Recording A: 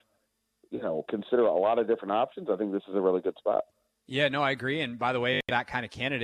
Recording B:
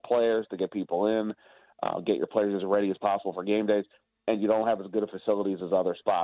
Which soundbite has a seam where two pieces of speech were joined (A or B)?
A